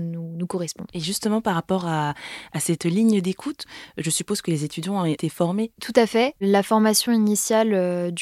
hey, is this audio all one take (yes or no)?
yes